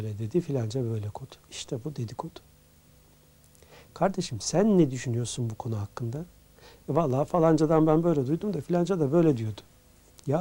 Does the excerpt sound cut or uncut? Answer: cut